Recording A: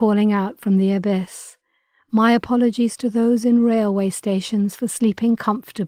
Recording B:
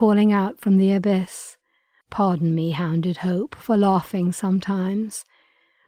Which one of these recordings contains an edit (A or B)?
B